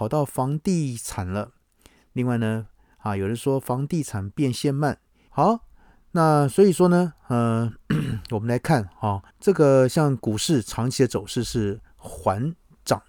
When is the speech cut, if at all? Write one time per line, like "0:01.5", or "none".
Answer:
0:05.3
0:09.3